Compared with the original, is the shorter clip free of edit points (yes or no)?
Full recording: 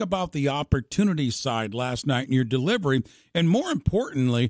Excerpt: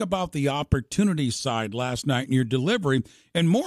yes